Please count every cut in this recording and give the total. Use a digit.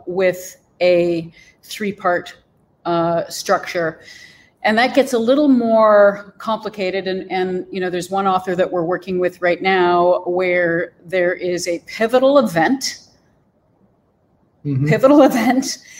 0